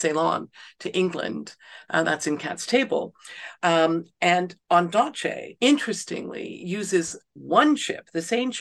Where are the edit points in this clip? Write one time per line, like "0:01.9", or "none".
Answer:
0:03.6
0:05.6